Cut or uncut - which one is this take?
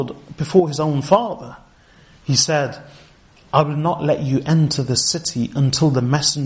uncut